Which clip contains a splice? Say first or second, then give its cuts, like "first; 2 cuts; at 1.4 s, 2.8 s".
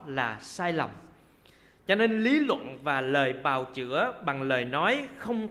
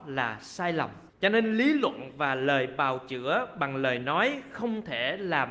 second; 1 cut; at 1.1 s